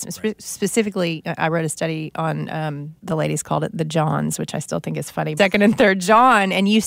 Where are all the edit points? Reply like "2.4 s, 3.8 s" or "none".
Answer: 3.0 s, 5.4 s